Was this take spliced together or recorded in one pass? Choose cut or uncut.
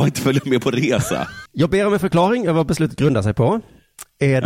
cut